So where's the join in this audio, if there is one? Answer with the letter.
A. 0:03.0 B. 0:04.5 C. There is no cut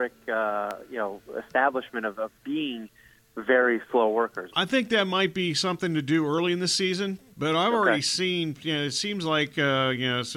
B